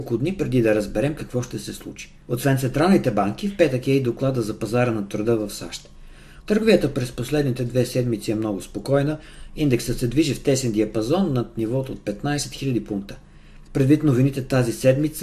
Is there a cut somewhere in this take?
yes; 3 cuts; at 2.2 s, 6.4 s, 13.7 s

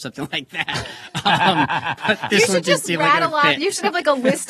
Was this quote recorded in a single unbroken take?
yes; 0 cuts

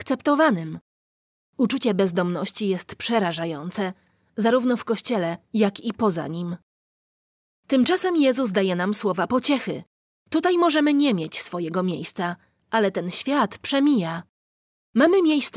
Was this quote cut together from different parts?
no; 0 cuts

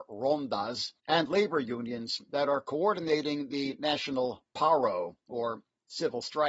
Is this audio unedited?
no; 1 cut; at 1.0 s

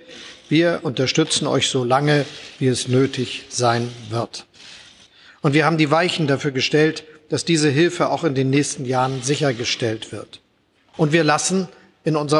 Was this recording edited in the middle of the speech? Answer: no; 0 cuts

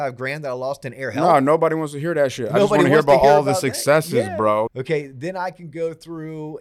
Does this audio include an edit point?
yes; 1 cut; at 4.7 s

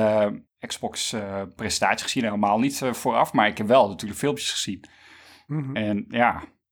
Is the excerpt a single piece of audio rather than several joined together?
yes; 0 cuts

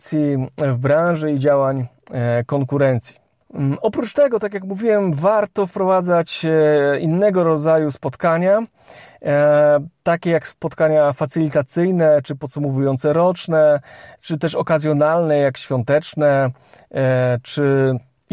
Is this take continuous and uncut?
yes; 0 cuts

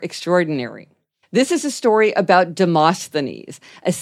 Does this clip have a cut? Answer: yes; 1 cut; at 1.2 s

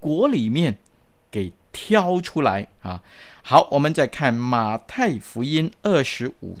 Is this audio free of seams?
no; 1 cut; at 2.8 s

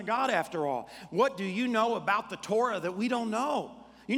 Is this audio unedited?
yes; 0 cuts

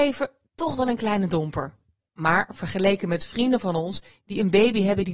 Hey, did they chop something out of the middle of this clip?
yes; 1 cut; at 2.0 s

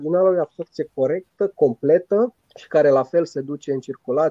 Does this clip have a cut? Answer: yes; 1 cut; at 2.4 s

